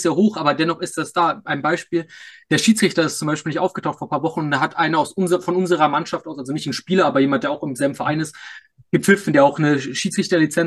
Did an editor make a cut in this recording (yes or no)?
no